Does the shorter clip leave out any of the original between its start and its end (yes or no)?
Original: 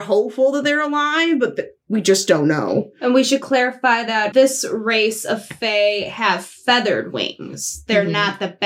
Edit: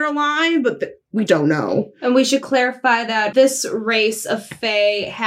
yes